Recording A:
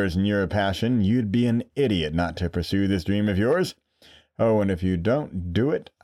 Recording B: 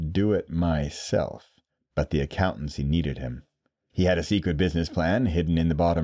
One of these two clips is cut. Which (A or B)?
B